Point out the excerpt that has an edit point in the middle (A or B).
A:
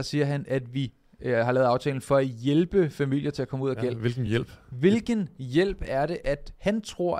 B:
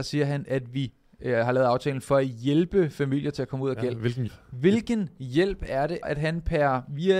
B